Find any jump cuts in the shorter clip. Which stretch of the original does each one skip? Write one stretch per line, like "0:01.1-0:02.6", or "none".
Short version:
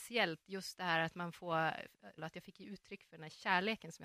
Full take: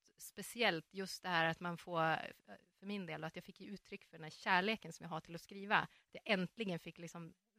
0:02.6-0:03.2

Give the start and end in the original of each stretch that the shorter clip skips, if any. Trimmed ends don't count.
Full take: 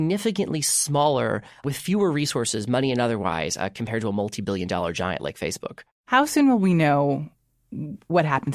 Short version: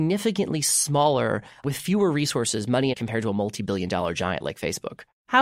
0:02.9-0:03.7

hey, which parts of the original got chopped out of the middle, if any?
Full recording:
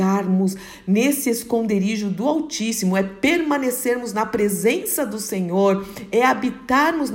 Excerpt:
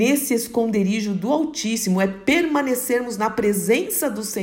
none

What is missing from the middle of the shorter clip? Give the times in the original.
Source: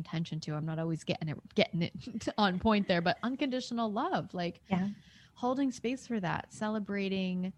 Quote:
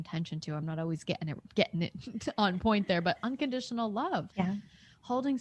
0:04.3-0:04.6

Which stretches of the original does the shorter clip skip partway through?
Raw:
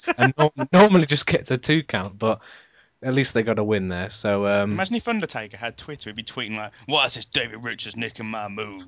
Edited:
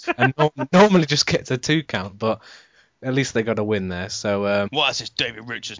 0:04.7-0:06.8

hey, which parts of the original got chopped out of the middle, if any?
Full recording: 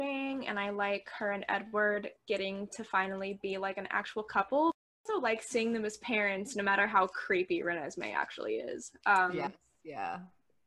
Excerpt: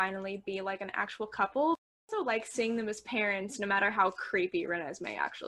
none

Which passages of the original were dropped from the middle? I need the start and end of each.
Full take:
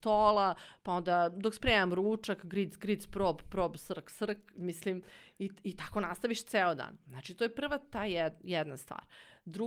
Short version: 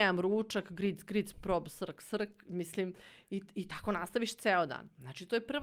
0:03.1-0:03.4

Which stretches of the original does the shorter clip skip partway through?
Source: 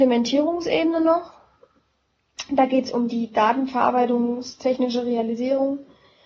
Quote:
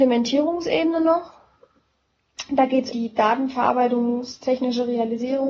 0:02.9-0:03.1

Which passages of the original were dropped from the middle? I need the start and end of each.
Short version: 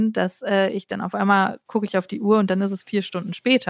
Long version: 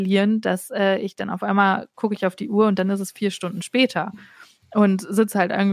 none

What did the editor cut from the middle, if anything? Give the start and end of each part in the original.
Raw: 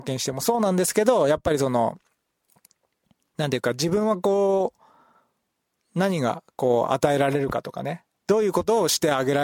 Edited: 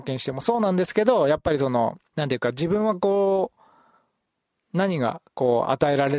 0:02.1-0:03.3

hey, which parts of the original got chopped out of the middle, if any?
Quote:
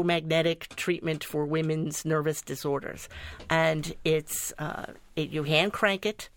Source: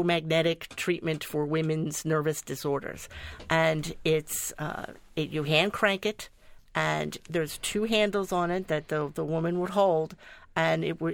none

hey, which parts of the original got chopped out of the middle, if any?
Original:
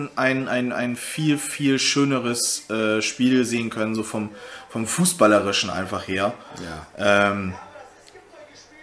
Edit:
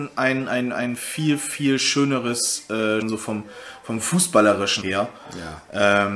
0:03.0-0:03.9
0:05.7-0:06.1

